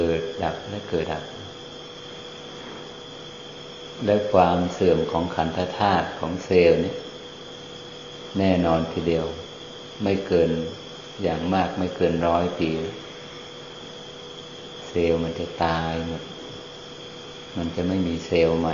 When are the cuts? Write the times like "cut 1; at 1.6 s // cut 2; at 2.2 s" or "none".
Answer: cut 1; at 1.0 s